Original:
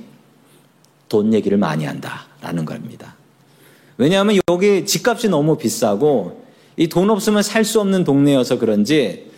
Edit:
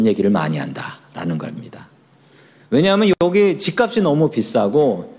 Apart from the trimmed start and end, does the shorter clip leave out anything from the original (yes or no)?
no